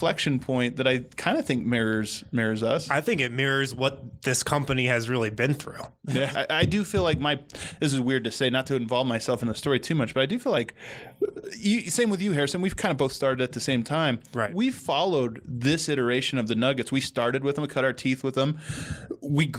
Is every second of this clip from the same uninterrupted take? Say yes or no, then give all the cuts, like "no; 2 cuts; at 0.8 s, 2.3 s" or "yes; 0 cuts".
no; 1 cut; at 6.3 s